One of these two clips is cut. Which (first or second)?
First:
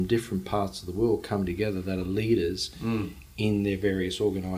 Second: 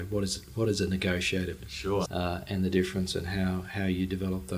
second